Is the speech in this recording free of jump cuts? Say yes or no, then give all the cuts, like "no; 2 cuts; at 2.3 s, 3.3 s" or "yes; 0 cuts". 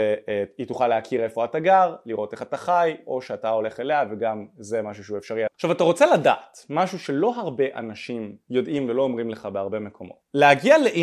no; 1 cut; at 5.5 s